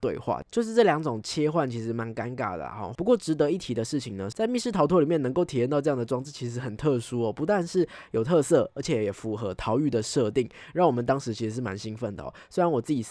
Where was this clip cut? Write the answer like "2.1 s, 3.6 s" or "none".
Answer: 2.9 s, 4.3 s